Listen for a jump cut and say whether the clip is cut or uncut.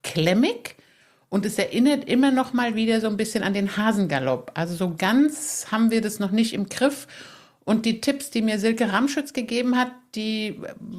uncut